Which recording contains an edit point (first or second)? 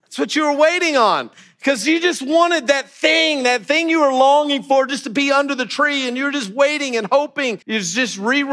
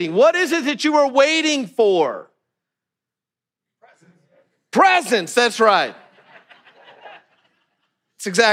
first